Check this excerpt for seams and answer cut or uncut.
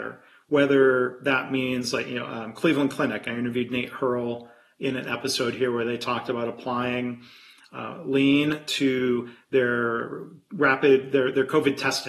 uncut